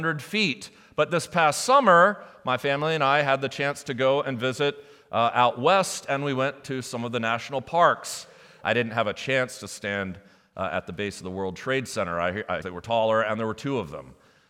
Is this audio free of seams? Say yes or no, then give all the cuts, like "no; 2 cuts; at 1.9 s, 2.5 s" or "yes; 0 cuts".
no; 2 cuts; at 8.6 s, 12.6 s